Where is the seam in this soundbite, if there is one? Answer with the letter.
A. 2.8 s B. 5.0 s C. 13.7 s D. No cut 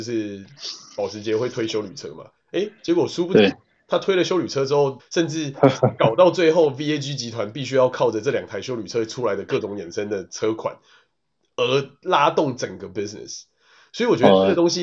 B